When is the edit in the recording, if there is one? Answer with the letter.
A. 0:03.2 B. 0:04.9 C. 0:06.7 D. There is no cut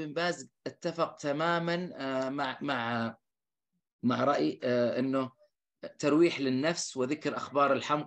D